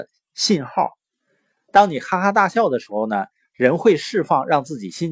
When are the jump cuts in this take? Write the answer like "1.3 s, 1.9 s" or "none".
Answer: 1.5 s